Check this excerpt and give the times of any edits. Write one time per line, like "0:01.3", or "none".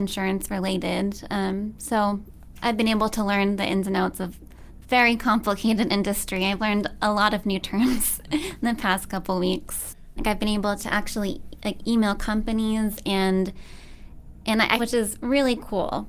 0:10.2
0:14.8